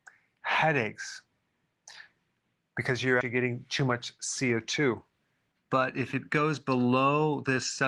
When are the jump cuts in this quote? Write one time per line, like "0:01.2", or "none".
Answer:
0:03.2
0:05.5